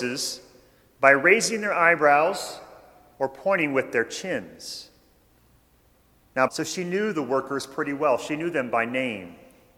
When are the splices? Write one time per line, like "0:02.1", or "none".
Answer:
0:06.5